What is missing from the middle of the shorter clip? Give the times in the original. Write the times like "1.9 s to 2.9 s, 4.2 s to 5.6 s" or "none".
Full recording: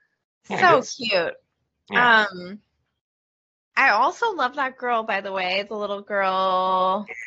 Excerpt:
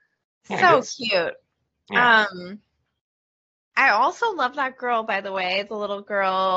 none